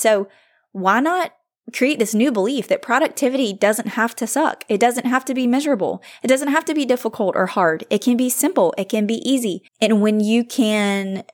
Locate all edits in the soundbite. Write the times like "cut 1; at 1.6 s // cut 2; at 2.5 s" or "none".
cut 1; at 9.7 s